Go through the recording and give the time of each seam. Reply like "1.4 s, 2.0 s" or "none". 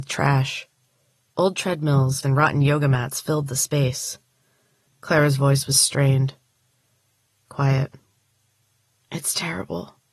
2.2 s, 4.9 s